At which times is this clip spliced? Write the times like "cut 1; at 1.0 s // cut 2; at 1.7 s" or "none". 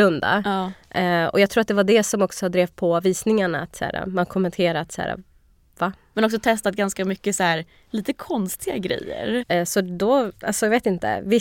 cut 1; at 6.1 s // cut 2; at 9.4 s